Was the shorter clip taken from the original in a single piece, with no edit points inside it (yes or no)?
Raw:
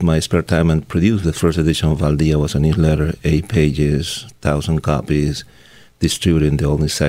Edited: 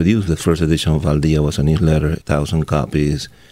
no